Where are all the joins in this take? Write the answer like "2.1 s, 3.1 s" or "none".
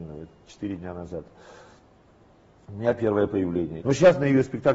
3.8 s